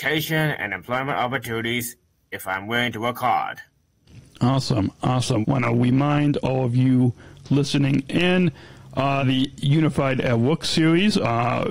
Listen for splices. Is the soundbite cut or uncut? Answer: cut